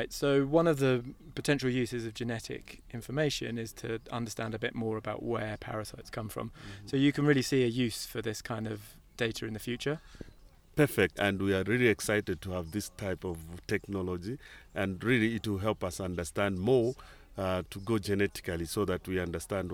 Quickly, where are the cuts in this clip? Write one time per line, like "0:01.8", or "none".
0:11.2